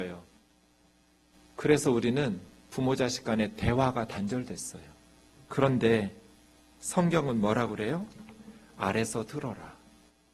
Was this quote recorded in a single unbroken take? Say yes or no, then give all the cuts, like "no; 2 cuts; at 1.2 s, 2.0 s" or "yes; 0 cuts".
yes; 0 cuts